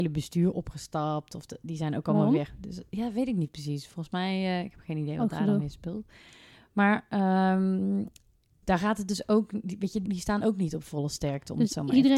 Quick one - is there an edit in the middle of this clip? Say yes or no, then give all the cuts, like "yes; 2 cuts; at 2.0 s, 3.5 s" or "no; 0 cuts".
yes; 2 cuts; at 8.6 s, 10.1 s